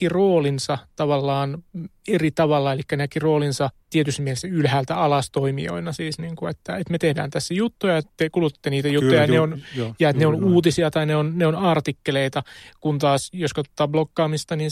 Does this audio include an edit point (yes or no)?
no